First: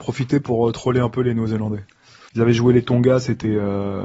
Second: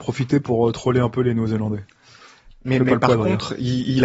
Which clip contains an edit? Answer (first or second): first